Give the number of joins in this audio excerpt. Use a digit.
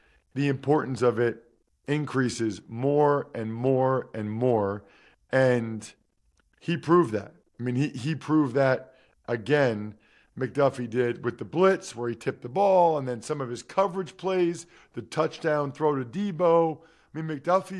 0